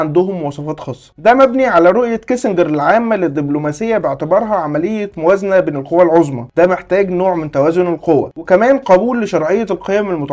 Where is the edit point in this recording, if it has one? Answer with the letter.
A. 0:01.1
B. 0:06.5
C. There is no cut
A